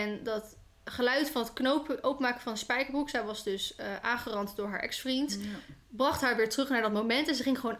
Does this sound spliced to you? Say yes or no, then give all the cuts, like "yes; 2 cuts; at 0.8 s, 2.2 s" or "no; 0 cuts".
no; 0 cuts